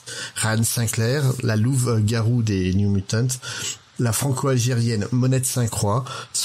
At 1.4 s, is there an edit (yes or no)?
no